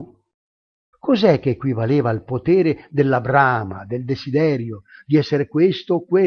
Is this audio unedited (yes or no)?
no